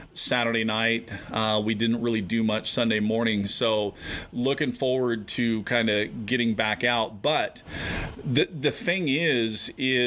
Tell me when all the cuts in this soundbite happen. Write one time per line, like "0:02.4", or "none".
none